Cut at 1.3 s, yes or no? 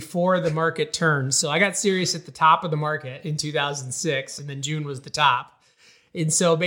no